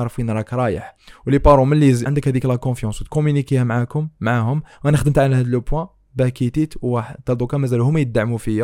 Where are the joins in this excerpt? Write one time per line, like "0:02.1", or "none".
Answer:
0:02.1